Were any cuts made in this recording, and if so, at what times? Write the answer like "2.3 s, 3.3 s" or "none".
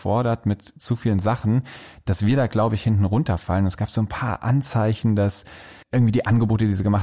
5.8 s